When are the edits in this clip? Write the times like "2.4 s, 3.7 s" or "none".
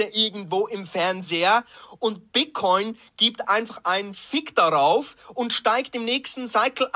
none